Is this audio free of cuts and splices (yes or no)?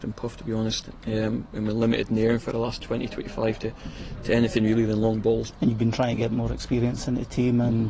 no